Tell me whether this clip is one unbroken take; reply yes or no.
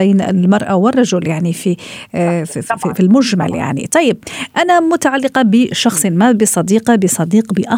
yes